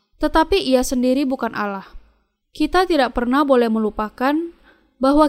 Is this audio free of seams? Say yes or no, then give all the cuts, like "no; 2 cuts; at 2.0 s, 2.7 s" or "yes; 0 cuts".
no; 1 cut; at 2.4 s